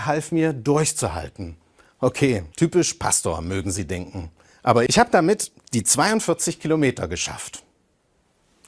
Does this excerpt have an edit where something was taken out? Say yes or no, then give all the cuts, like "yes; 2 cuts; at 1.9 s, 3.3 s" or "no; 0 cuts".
yes; 2 cuts; at 2.5 s, 4.9 s